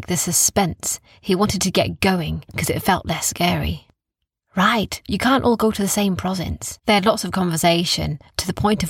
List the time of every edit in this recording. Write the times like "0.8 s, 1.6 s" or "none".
5.0 s, 6.8 s